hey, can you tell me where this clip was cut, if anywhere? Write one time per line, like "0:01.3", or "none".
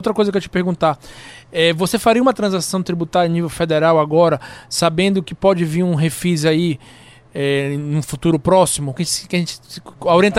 0:09.0